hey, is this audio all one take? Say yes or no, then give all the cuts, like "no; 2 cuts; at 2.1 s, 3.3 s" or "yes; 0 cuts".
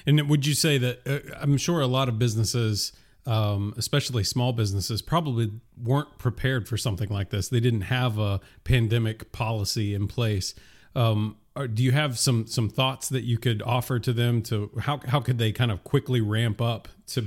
yes; 0 cuts